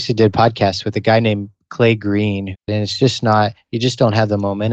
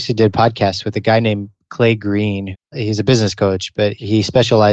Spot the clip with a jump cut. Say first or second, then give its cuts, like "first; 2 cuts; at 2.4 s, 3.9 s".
first; 1 cut; at 2.7 s